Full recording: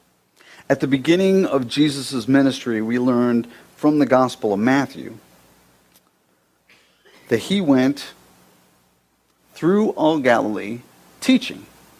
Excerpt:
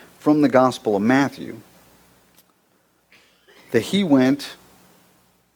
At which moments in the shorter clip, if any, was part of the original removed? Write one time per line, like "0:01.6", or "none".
none